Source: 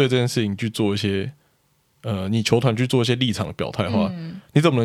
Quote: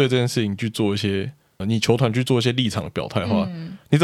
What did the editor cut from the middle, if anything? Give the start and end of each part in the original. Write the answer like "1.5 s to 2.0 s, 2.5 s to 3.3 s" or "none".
1.6 s to 2.2 s